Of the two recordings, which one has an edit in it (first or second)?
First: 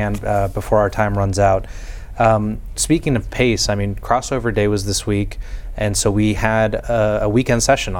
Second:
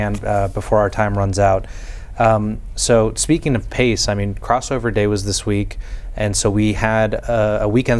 first